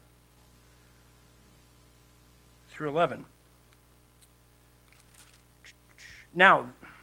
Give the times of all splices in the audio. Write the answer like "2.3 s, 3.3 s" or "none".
none